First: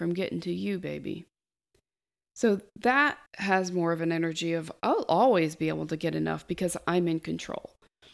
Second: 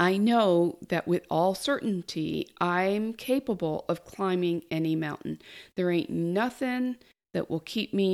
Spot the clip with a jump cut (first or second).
first